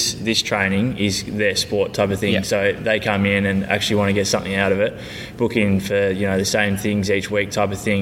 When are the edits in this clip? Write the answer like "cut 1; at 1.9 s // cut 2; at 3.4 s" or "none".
none